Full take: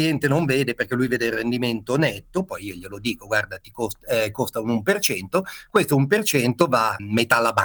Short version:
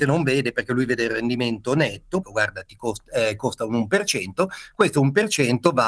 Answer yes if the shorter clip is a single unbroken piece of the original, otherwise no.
no